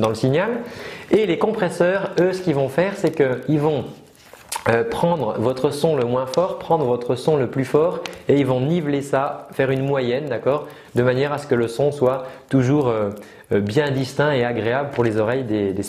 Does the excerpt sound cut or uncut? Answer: uncut